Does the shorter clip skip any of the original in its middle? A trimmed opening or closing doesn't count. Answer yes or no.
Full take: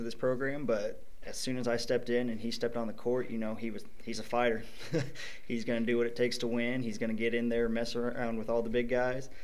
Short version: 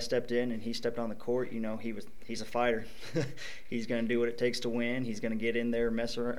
no